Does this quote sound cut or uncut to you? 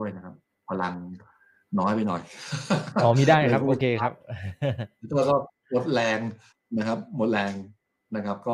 uncut